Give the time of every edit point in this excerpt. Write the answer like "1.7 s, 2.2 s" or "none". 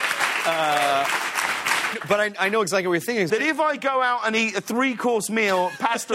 1.9 s, 3.3 s

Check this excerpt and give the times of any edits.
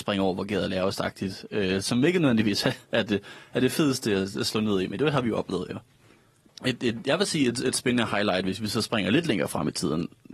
6.5 s

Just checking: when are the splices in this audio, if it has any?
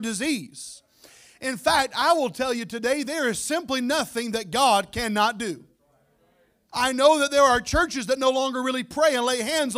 6.7 s

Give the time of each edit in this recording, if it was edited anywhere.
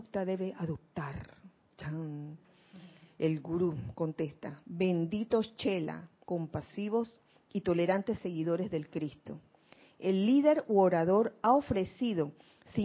6.2 s

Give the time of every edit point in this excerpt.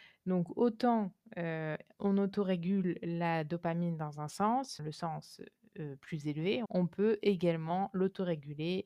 4.8 s, 6.6 s

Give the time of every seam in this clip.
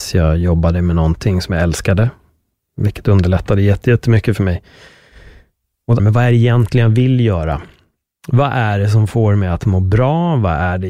6.0 s

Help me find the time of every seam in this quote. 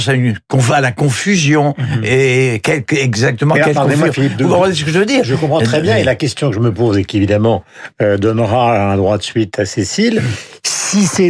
none

